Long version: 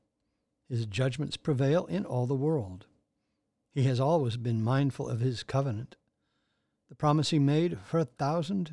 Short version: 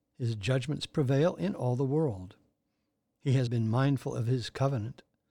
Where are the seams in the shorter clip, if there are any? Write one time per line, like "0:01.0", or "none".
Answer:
0:03.5